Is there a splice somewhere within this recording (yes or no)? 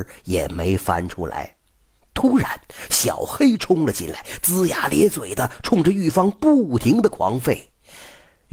no